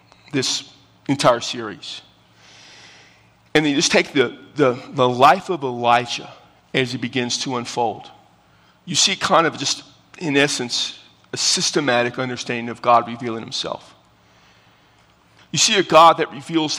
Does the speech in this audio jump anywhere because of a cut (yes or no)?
yes